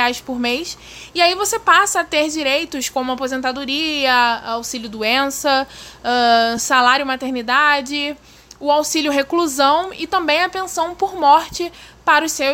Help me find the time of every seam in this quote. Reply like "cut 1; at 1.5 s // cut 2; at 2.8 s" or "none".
none

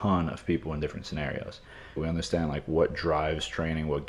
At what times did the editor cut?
cut 1; at 2.0 s

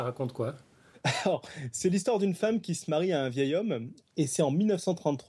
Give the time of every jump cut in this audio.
cut 1; at 4.1 s

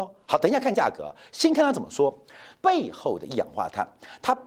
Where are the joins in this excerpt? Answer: cut 1; at 2.5 s

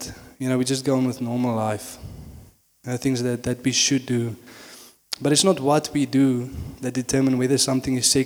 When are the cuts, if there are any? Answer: none

